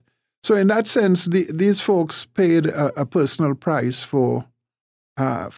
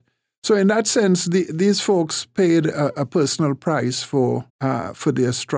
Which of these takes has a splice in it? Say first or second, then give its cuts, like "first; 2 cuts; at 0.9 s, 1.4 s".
second; 1 cut; at 4.5 s